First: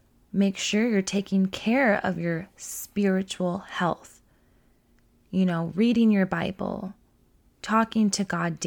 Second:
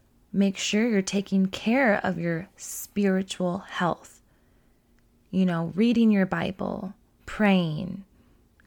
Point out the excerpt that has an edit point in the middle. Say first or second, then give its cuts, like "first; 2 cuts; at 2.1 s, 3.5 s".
second; 1 cut; at 7.2 s